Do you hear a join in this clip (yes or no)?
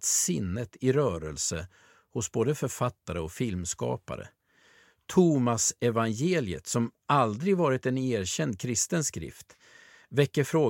no